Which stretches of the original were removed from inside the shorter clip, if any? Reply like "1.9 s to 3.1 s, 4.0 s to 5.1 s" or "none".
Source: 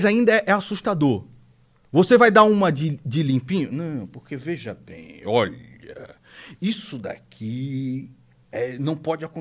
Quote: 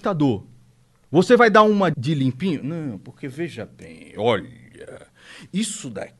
2.7 s to 3.0 s